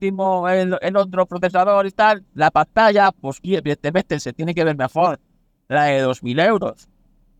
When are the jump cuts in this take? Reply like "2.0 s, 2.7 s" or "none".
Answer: none

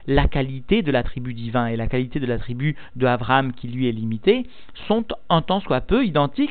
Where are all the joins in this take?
none

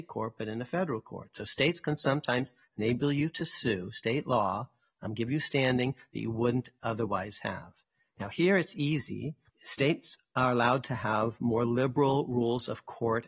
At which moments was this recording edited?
none

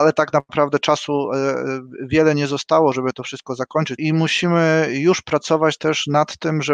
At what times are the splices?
4.0 s

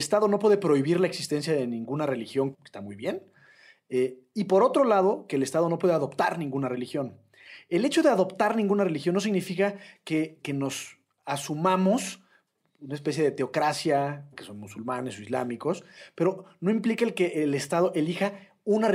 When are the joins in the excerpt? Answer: 2.5 s, 10.4 s, 14.3 s

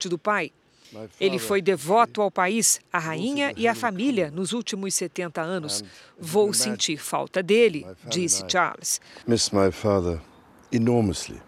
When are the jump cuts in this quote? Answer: none

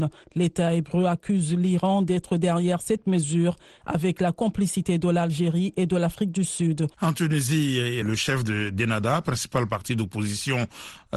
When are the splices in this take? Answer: 6.9 s, 8.0 s

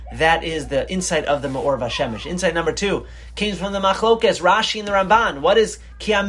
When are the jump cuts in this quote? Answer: none

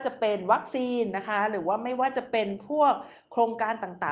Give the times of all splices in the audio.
none

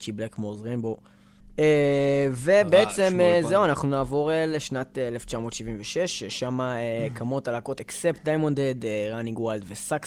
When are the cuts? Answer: none

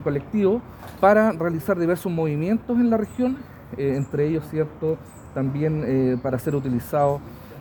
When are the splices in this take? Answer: none

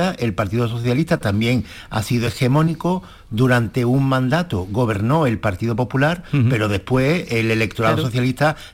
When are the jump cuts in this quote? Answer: none

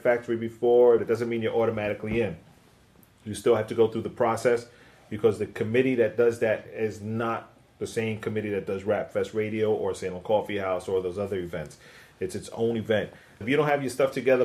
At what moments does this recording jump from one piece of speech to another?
1.0 s, 13.4 s

